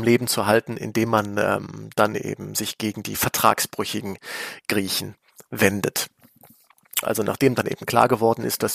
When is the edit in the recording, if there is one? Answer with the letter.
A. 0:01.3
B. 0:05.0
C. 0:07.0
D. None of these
C